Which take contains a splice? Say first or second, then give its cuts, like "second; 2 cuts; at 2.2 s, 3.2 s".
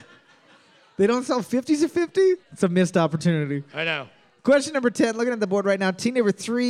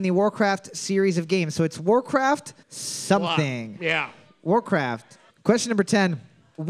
second; 2 cuts; at 2.6 s, 5.3 s